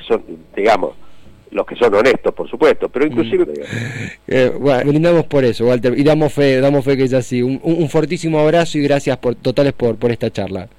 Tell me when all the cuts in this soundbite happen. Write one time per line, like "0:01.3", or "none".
0:03.5
0:04.8